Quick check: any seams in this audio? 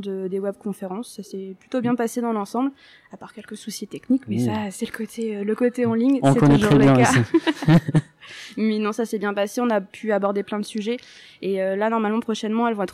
no; 0 cuts

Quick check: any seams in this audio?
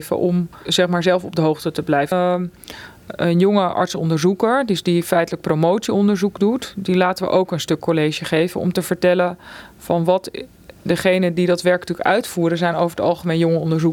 yes; 2 cuts; at 2.1 s, 3.1 s

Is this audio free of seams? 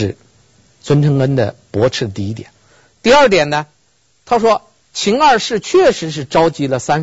yes; 0 cuts

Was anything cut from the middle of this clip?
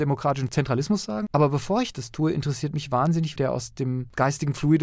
yes; 1 cut; at 3.4 s

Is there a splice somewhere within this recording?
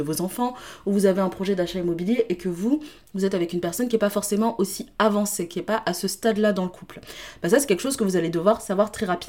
no; 0 cuts

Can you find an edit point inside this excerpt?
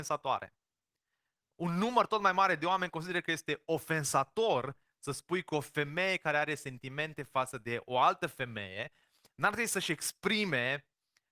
no; 0 cuts

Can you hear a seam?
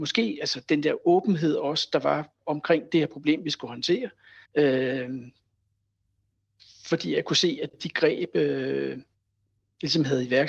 yes; 2 cuts; at 4.5 s, 7.7 s

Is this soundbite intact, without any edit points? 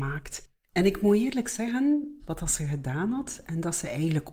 no; 1 cut; at 2.2 s

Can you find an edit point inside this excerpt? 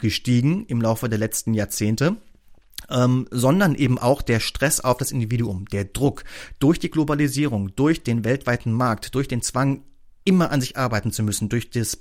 no; 0 cuts

